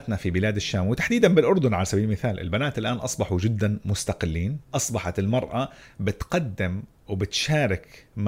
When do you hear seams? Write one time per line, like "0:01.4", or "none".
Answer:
0:04.7